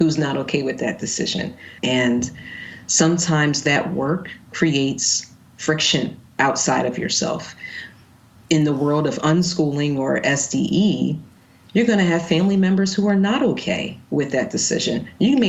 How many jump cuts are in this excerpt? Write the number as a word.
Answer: one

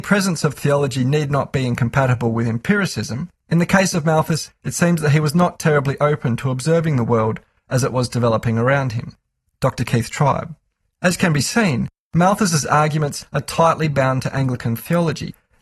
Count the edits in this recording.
two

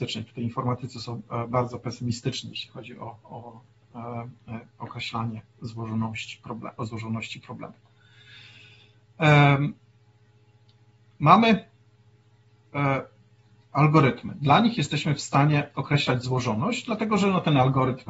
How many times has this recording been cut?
zero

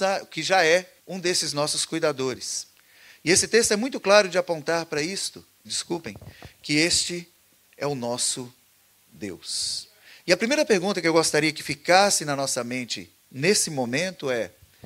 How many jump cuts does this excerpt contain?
two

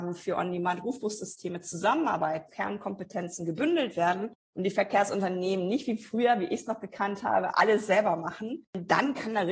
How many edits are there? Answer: one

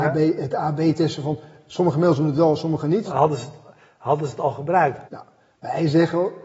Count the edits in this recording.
two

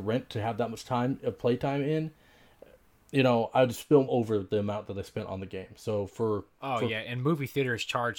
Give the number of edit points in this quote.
one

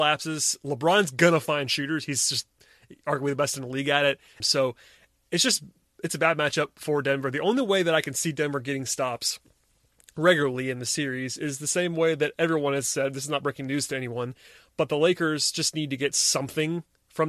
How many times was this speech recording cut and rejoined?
one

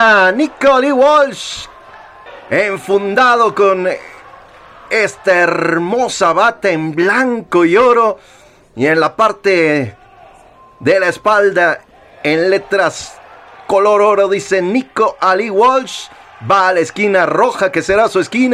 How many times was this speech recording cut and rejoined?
zero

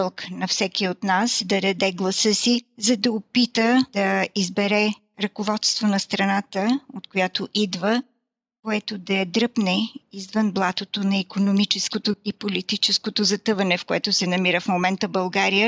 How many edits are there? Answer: zero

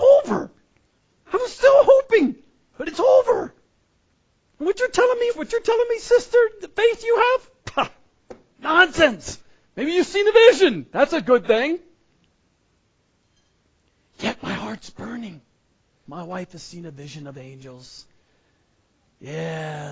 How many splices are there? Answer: two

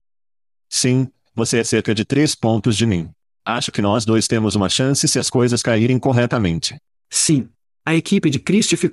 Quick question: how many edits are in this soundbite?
one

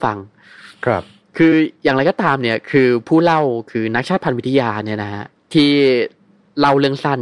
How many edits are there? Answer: zero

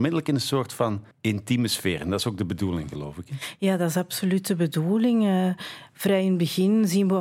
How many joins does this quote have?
one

